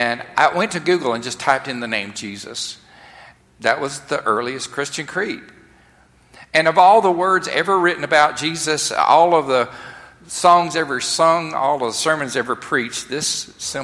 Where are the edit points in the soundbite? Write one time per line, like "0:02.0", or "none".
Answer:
0:03.4